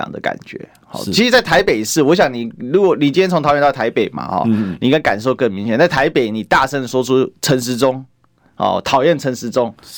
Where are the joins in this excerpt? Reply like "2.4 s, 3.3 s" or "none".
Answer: none